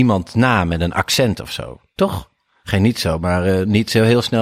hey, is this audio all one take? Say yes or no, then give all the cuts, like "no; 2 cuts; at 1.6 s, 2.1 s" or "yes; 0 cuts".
yes; 0 cuts